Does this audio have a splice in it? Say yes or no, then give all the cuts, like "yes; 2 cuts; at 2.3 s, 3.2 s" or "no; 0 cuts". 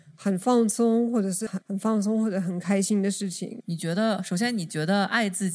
yes; 2 cuts; at 1.5 s, 3.6 s